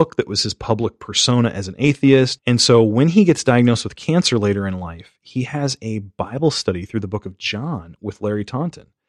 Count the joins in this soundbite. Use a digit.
1